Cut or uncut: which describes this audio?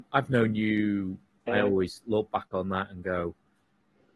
cut